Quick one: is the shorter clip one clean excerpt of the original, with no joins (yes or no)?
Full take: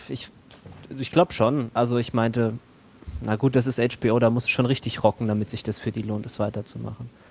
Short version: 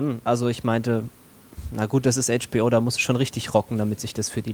yes